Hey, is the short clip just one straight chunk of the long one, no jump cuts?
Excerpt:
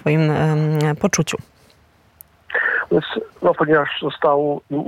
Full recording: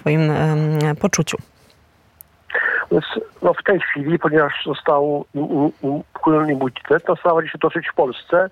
no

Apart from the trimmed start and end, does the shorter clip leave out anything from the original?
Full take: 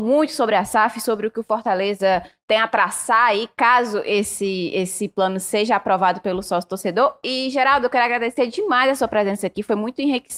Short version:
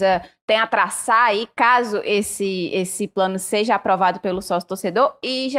no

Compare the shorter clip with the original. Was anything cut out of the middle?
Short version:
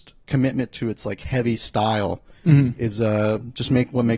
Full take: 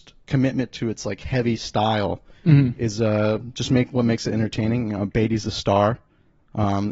no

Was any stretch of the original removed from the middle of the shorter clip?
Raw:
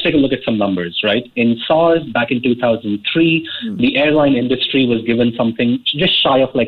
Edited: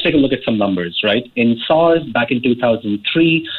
no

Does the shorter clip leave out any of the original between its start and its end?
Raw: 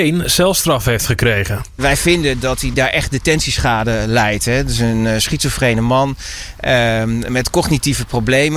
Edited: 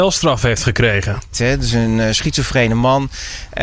yes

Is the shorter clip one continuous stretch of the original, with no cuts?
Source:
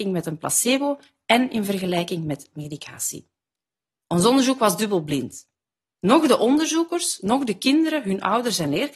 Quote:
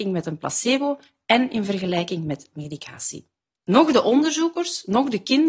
no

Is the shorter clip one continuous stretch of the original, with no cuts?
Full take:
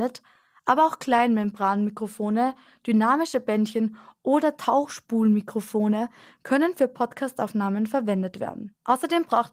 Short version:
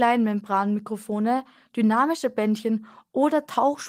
yes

